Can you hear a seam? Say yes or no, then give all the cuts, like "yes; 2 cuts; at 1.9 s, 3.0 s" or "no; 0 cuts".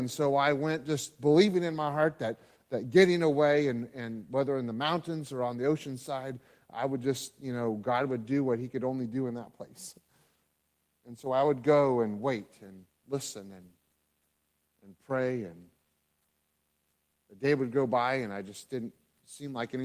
no; 0 cuts